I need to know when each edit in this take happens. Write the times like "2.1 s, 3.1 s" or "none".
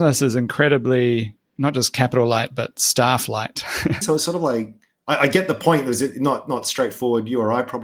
4.0 s